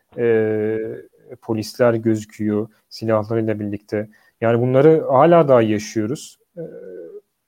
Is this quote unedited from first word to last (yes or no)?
no